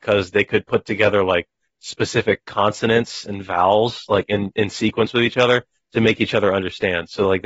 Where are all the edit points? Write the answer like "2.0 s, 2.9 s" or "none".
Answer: none